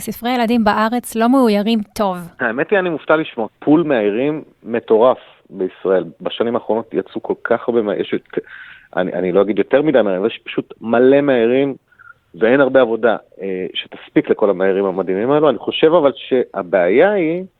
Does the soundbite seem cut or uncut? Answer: cut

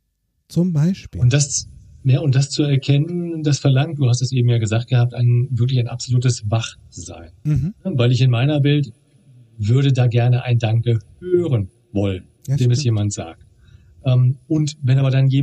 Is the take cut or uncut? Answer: uncut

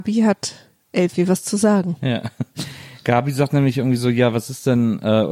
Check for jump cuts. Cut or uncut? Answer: uncut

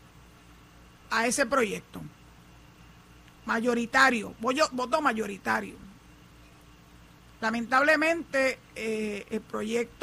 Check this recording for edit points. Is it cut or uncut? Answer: uncut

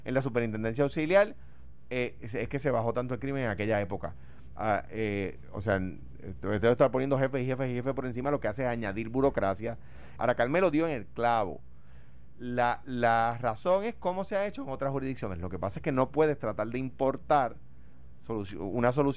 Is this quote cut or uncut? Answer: cut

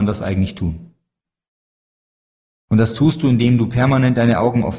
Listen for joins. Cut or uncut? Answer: cut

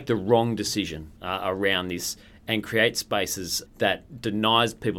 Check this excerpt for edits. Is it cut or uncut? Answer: cut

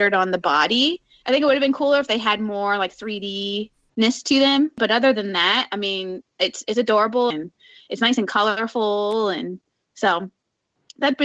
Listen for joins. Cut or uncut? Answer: cut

